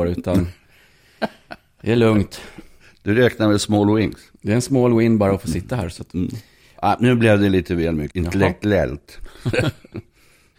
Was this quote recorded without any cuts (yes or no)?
no